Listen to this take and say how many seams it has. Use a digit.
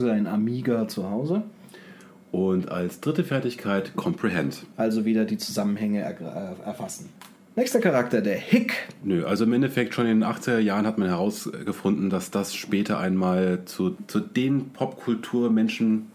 1